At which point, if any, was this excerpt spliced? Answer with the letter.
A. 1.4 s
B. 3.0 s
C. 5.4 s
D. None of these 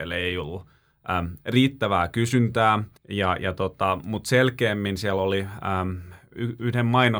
B